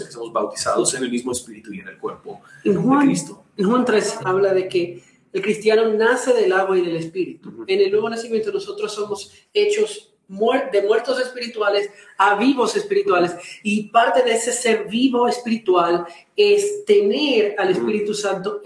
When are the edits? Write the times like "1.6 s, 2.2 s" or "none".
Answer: 4.2 s

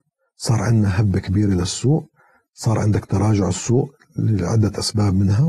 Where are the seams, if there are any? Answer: none

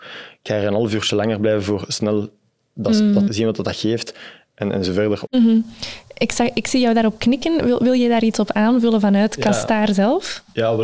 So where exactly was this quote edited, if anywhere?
3.3 s, 5.3 s

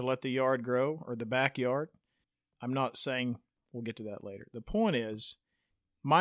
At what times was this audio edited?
3.6 s

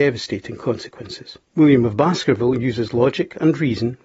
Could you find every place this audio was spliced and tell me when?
1.4 s

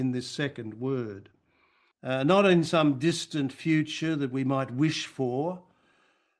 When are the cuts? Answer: 1.9 s

